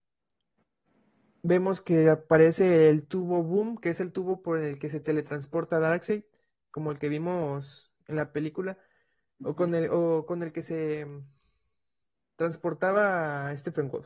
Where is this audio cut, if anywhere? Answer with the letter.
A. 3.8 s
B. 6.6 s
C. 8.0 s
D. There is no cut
C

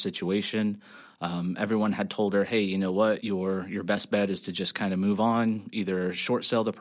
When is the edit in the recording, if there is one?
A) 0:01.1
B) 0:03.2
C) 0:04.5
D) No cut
B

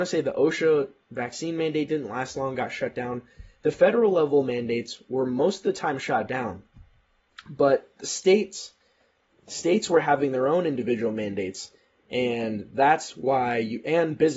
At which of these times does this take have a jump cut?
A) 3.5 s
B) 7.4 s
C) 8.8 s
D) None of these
D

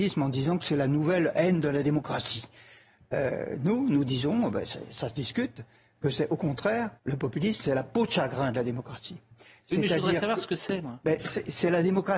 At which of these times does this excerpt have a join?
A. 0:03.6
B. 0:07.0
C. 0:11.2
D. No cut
B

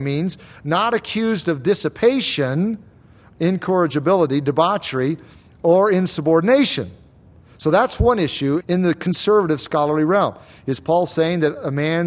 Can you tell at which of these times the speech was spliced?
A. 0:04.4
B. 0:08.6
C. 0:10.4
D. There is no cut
B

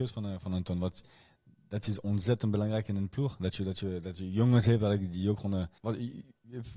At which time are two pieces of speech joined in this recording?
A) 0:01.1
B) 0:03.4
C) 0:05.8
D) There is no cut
C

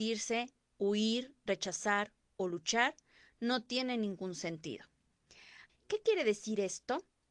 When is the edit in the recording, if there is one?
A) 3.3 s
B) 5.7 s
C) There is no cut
B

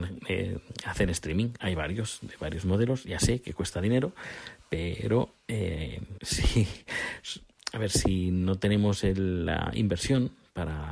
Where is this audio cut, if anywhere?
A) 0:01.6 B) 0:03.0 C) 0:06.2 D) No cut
C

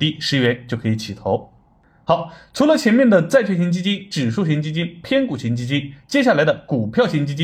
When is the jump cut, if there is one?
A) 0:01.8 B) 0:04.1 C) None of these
C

